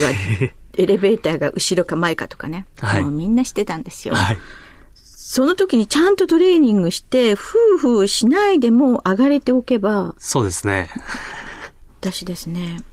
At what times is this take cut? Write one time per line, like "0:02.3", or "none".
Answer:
0:04.1
0:11.9

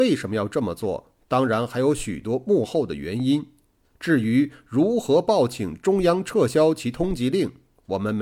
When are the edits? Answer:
none

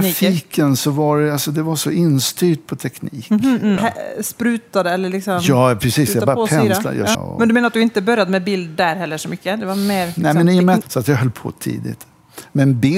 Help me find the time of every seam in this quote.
0:03.8
0:07.1
0:10.8

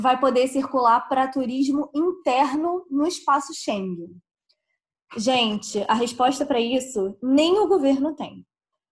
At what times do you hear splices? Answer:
0:04.9

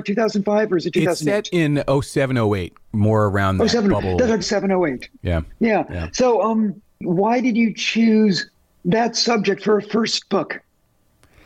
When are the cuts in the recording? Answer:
0:04.4

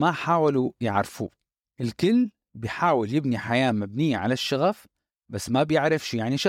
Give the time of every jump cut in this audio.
none

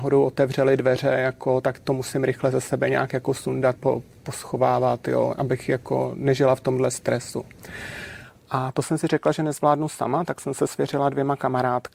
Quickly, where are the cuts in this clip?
0:03.8

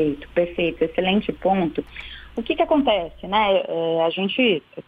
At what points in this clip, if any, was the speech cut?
none

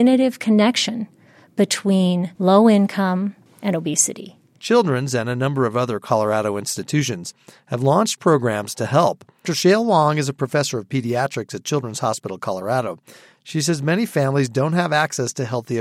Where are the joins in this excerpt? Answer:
0:02.3
0:03.5
0:09.5

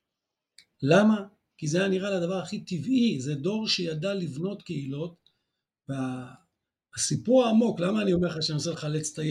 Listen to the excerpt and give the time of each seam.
none

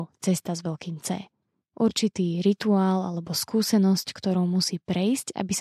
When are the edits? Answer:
0:01.7

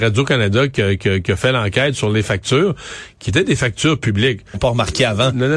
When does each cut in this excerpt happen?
0:04.5

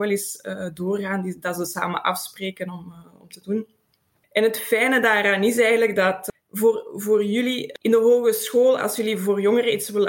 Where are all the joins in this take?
none

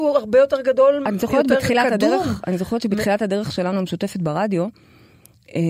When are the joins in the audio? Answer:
none

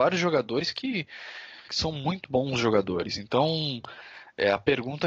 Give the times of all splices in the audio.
0:01.7

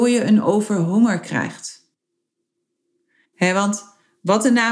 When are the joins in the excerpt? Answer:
0:03.2

